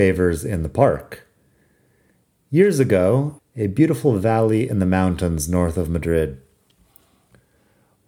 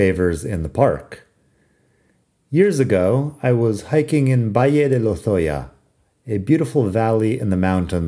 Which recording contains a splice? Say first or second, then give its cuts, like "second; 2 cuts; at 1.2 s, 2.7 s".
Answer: first; 1 cut; at 3.4 s